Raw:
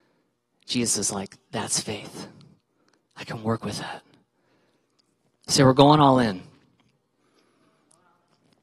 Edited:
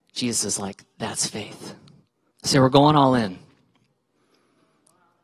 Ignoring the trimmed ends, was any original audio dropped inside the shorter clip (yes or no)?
yes